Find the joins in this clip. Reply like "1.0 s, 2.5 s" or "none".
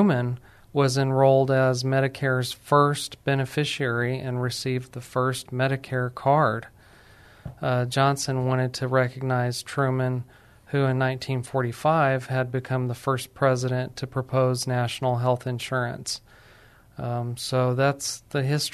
none